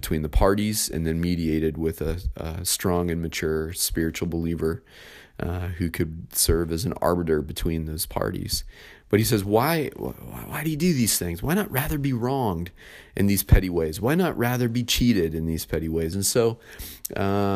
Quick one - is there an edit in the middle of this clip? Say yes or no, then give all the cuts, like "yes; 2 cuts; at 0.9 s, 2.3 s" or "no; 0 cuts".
yes; 1 cut; at 16.1 s